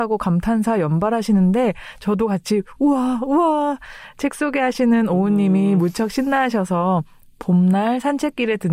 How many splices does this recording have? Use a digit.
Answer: 0